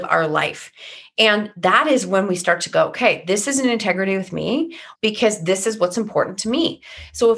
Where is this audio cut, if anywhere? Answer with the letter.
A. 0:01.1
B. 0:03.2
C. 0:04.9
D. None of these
C